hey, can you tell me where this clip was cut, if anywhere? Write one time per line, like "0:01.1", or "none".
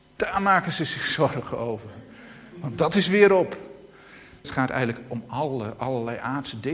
0:04.4